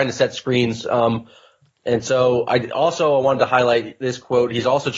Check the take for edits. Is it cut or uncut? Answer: uncut